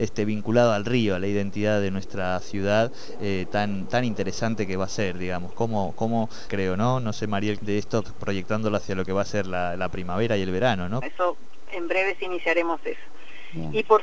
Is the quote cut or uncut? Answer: cut